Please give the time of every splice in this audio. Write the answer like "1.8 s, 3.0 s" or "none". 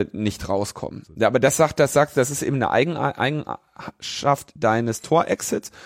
none